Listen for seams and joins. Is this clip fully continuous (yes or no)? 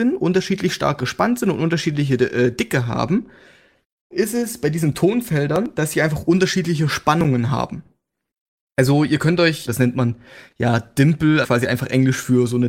no